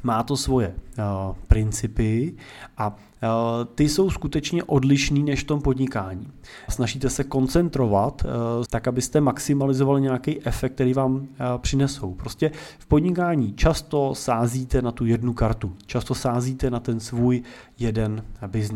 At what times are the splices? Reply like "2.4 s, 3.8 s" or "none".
6.7 s, 8.7 s